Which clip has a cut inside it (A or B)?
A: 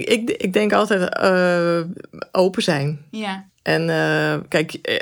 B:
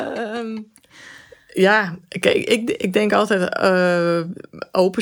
A